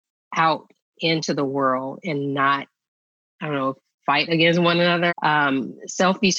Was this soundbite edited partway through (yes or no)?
yes